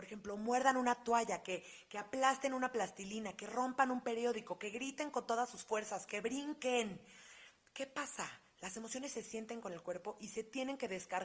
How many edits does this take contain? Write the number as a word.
one